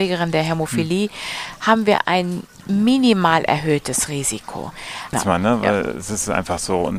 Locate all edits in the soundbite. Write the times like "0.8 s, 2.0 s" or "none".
5.1 s